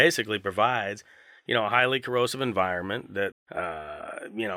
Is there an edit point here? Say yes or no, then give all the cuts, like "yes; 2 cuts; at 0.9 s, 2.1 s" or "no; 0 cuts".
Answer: yes; 1 cut; at 3.3 s